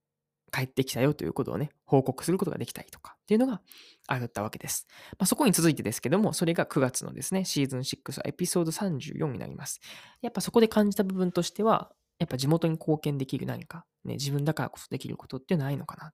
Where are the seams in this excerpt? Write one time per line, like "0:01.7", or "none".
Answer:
0:10.1